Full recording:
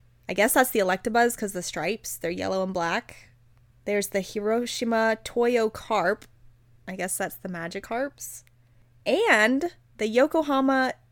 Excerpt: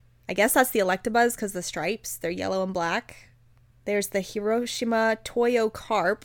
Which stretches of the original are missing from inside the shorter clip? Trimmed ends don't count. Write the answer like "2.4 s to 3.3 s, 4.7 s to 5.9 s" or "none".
none